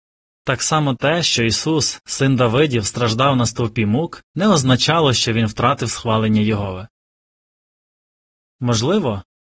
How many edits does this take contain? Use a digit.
0